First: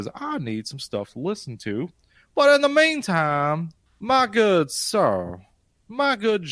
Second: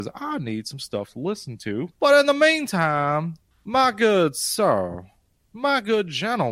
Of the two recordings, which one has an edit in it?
second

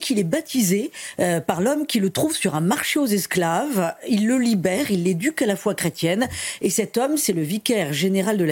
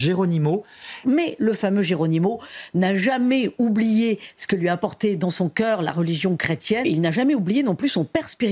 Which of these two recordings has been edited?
second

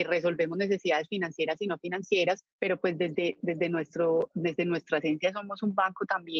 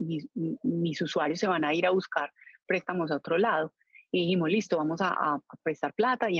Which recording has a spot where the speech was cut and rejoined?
first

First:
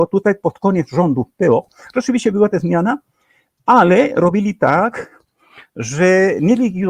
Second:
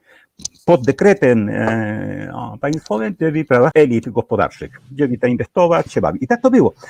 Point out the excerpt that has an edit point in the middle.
second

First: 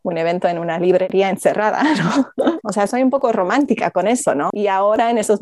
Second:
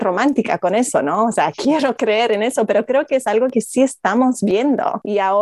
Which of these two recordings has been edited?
first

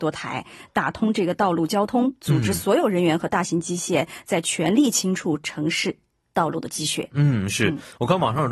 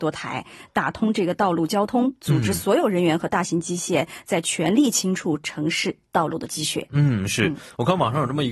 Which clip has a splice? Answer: second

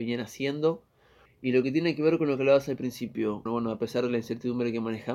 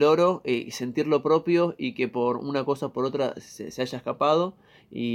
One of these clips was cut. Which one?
first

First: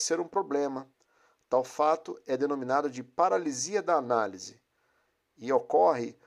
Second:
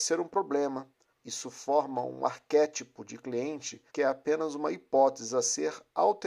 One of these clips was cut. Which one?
second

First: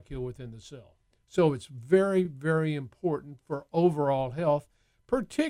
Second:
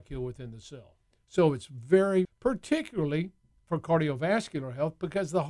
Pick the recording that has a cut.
second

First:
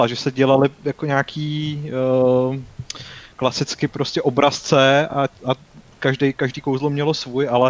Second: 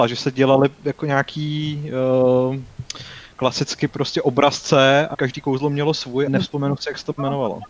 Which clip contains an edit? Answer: second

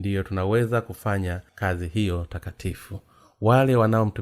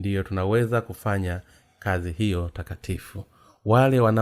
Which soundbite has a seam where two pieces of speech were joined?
first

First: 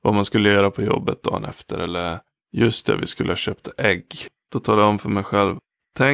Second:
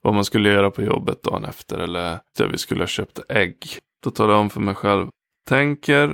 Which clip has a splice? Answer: second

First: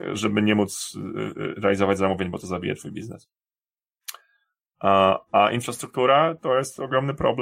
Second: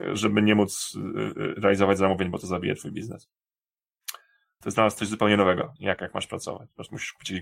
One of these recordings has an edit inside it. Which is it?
second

